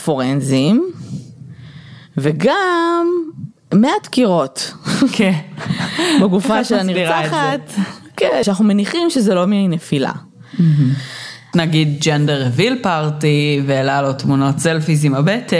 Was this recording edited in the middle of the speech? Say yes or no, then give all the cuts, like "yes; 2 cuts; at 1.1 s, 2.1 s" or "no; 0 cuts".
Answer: yes; 2 cuts; at 8.4 s, 11.5 s